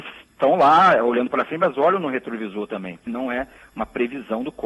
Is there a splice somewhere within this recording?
yes; 1 cut; at 3.1 s

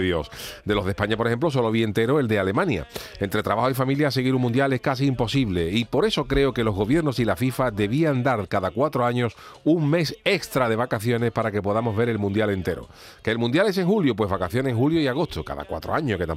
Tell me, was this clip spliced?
no; 0 cuts

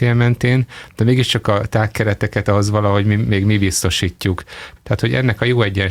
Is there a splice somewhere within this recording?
yes; 1 cut; at 4.8 s

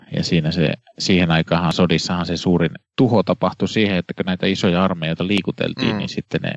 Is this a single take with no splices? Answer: no; 1 cut; at 2.8 s

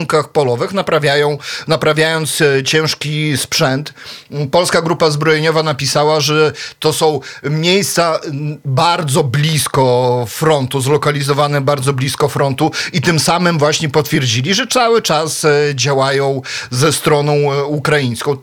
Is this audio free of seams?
yes; 0 cuts

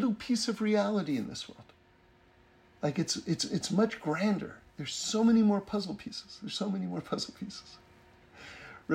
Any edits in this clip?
no; 0 cuts

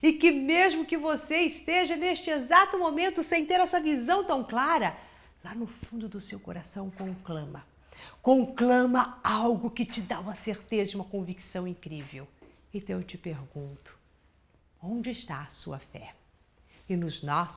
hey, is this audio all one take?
yes; 0 cuts

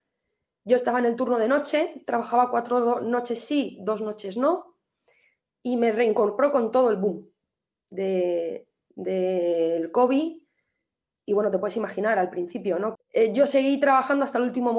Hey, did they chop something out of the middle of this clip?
yes; 1 cut; at 12.9 s

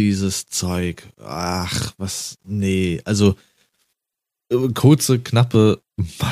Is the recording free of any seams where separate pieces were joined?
yes; 0 cuts

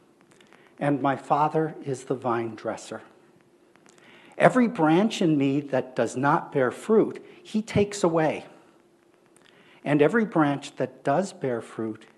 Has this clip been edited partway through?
no; 0 cuts

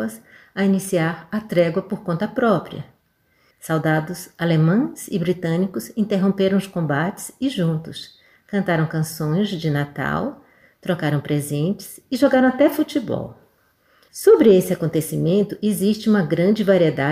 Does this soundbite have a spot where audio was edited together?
yes; 1 cut; at 3.5 s

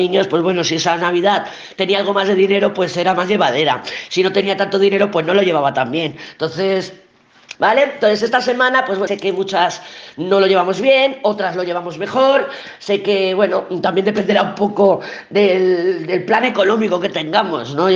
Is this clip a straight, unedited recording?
no; 2 cuts; at 7.5 s, 9.1 s

